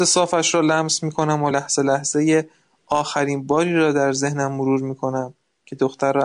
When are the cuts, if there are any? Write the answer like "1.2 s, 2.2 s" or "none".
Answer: none